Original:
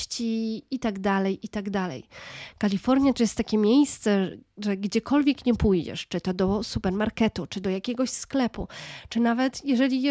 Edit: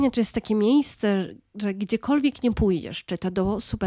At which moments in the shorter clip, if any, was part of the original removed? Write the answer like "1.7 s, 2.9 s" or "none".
none